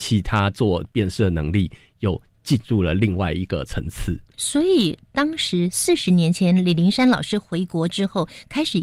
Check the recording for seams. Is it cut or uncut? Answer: uncut